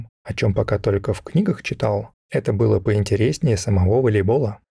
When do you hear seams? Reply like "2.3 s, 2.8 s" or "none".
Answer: none